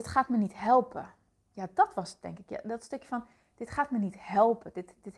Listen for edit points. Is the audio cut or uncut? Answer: uncut